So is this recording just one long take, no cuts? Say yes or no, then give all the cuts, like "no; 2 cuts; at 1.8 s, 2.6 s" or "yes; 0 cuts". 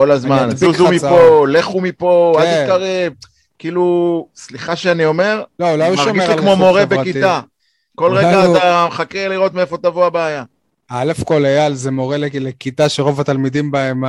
yes; 0 cuts